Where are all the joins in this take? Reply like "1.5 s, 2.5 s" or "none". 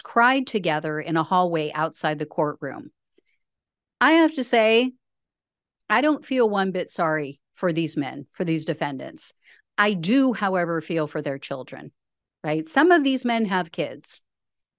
none